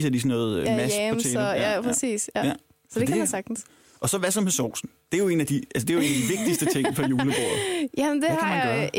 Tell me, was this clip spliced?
no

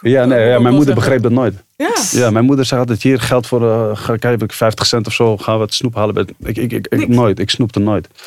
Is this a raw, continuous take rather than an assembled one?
yes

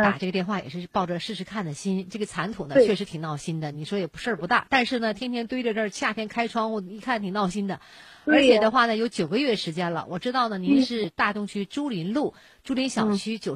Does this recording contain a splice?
no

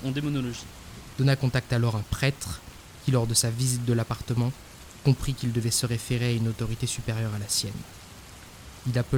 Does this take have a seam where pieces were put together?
yes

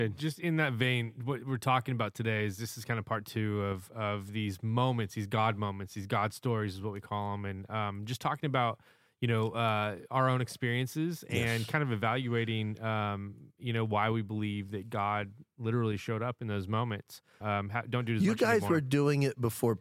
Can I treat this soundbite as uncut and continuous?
no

